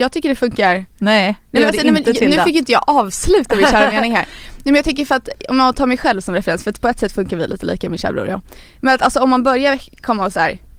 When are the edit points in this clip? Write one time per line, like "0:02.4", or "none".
none